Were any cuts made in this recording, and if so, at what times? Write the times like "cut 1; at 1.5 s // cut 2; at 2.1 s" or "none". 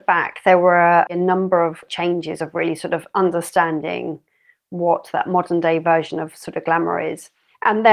cut 1; at 1.1 s